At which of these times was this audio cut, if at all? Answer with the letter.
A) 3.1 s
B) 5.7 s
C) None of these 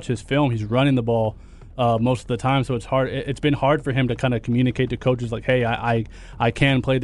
C